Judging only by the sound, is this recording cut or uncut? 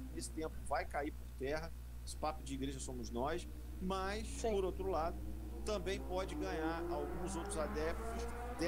uncut